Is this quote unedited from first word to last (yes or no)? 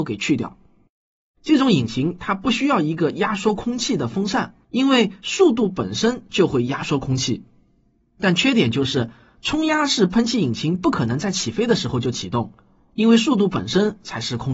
no